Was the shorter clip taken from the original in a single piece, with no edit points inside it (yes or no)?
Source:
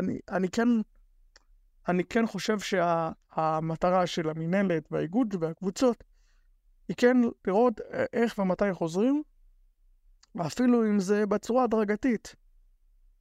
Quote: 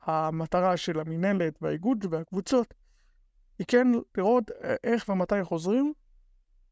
yes